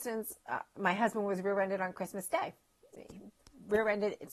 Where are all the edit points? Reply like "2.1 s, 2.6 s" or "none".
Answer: none